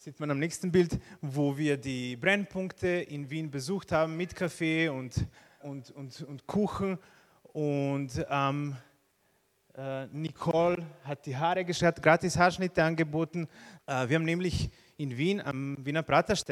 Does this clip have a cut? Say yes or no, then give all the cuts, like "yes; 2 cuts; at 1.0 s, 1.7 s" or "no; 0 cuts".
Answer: yes; 2 cuts; at 5.6 s, 13.8 s